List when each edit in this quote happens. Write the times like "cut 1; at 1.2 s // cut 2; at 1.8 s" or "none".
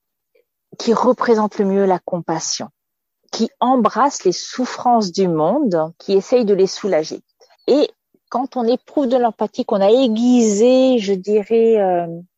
cut 1; at 6.0 s // cut 2; at 7.5 s